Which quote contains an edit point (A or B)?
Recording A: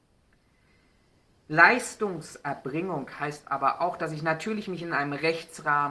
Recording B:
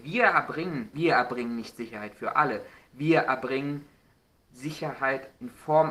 B